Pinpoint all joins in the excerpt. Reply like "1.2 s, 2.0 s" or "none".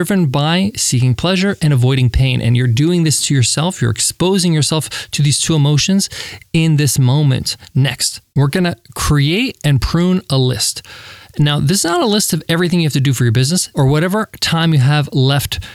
8.3 s, 13.7 s